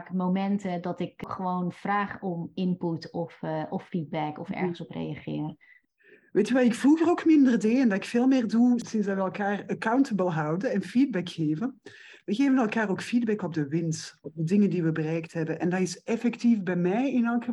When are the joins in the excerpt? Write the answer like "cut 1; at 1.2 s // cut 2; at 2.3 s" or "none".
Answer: cut 1; at 14.2 s